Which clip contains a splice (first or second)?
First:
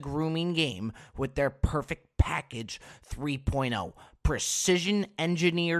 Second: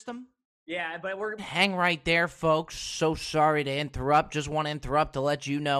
second